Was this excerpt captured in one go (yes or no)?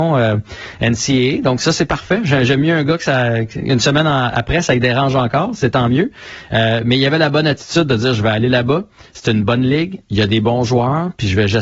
yes